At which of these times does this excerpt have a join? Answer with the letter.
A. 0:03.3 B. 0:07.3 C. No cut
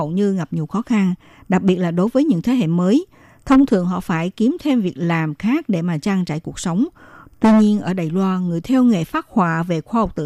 B